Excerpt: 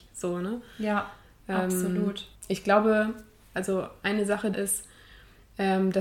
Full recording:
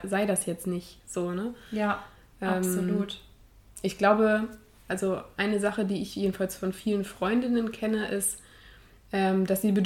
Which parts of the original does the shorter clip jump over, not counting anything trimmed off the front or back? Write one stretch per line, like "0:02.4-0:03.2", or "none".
0:03.3-0:03.7
0:05.9-0:08.1